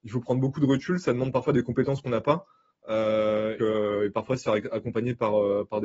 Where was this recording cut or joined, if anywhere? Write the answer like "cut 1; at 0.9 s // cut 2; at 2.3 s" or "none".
cut 1; at 3.6 s